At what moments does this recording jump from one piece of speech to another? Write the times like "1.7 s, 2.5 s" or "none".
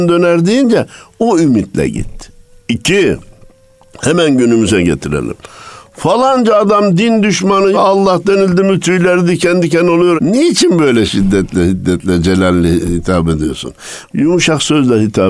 7.7 s, 10.2 s, 14.1 s